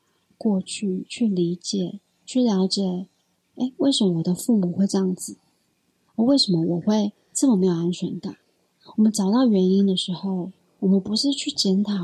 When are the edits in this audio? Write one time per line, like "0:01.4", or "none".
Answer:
none